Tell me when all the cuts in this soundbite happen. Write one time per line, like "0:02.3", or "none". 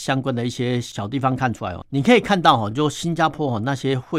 none